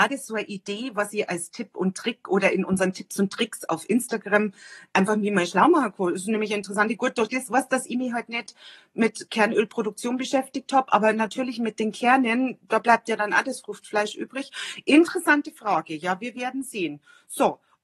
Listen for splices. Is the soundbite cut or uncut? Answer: uncut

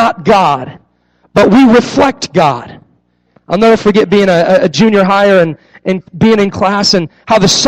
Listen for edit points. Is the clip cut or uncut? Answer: cut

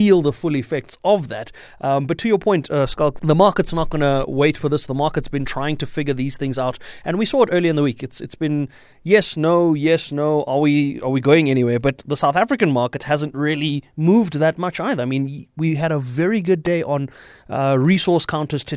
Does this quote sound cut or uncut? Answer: cut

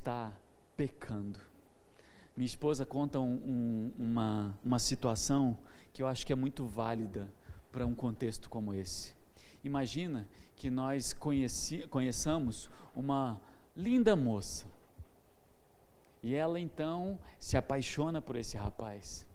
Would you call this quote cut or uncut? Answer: cut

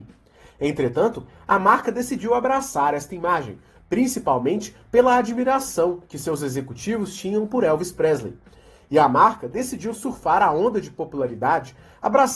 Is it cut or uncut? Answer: uncut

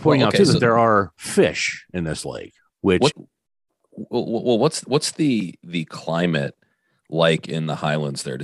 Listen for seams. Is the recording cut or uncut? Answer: cut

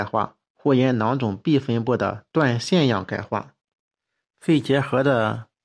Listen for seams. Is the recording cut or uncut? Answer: uncut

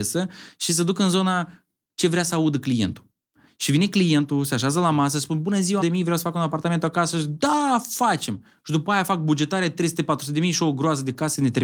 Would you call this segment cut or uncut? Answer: cut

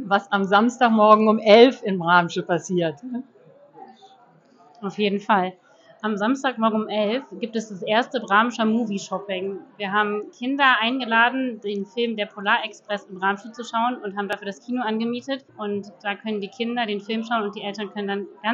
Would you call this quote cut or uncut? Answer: cut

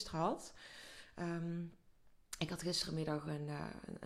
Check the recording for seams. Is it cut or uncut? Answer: uncut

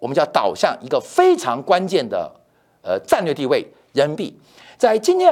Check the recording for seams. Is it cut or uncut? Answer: uncut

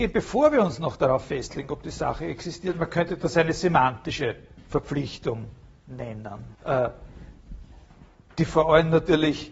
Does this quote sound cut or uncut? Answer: cut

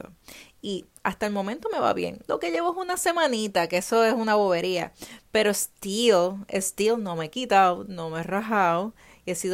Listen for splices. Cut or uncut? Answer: uncut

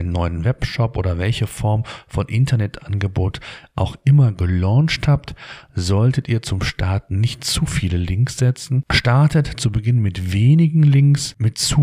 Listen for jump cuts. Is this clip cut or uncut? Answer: uncut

